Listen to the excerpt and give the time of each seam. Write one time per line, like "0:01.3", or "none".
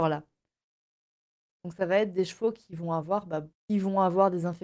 0:01.5
0:03.5